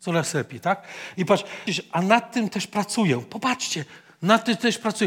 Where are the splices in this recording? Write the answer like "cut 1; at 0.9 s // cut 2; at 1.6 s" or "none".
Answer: cut 1; at 1.7 s